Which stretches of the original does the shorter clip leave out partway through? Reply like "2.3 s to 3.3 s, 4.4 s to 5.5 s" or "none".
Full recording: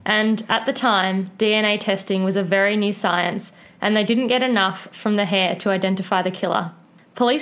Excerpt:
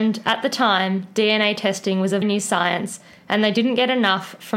2.4 s to 2.7 s